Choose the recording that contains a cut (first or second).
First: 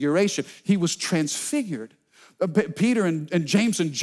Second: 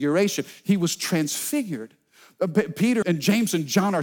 second